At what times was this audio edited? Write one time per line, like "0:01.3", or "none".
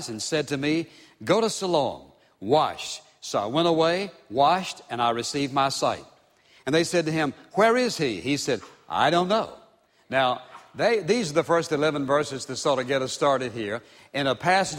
none